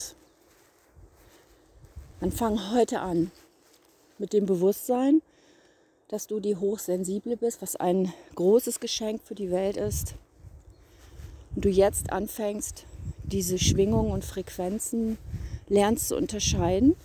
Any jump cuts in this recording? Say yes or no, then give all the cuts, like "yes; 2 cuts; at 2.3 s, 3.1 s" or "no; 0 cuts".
no; 0 cuts